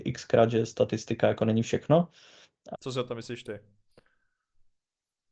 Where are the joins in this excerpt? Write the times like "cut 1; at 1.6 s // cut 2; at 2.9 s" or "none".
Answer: cut 1; at 2.7 s

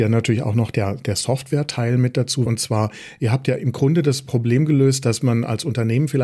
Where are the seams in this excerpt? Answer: cut 1; at 2.5 s

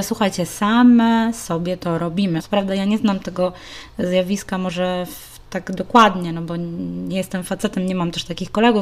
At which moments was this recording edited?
cut 1; at 2.4 s

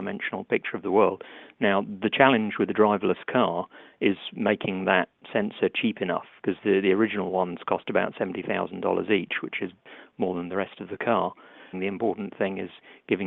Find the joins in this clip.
cut 1; at 11.7 s

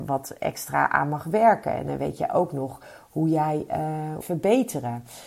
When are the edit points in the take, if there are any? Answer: cut 1; at 4.2 s

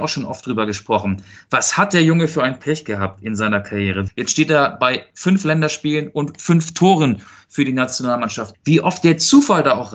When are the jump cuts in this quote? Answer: cut 1; at 4.1 s // cut 2; at 8.5 s

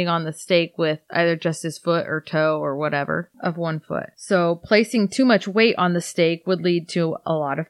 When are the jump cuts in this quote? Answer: cut 1; at 4.1 s

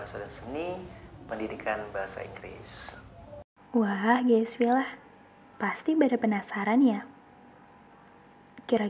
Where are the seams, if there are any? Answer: none

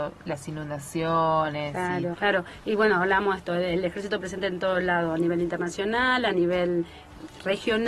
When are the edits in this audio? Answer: cut 1; at 2.1 s

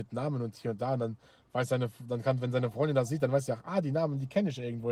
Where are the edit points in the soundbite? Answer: none

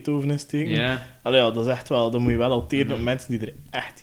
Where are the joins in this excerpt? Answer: none

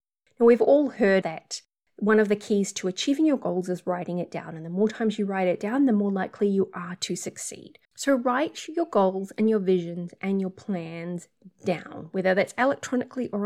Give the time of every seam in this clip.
cut 1; at 1.2 s // cut 2; at 7.8 s

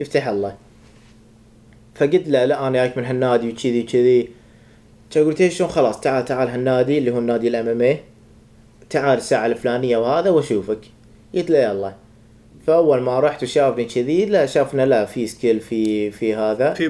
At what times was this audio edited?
none

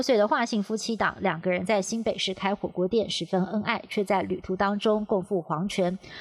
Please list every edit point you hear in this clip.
none

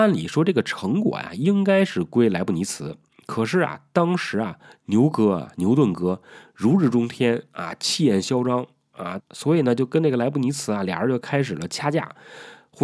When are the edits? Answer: cut 1; at 9.2 s

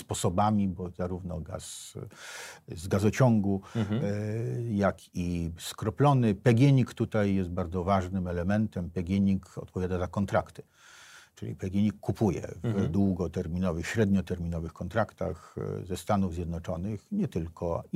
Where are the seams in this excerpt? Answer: none

